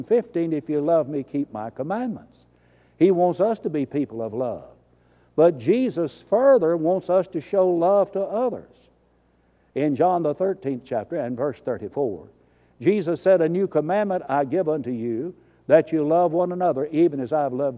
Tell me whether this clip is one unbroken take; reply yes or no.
yes